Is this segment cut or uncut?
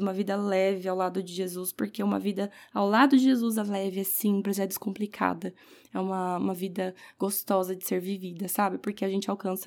uncut